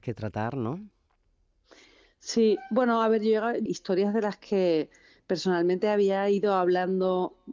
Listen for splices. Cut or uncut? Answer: cut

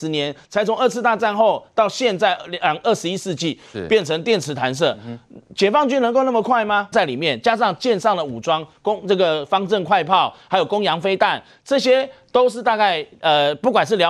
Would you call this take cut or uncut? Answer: cut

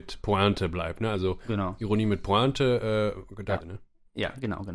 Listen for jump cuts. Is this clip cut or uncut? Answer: cut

